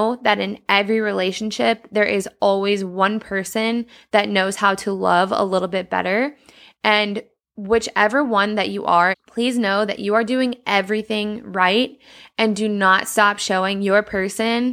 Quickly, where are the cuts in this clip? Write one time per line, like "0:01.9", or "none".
0:09.1